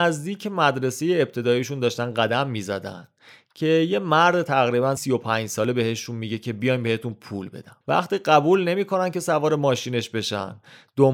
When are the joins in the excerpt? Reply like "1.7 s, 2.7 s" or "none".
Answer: 5.0 s, 7.8 s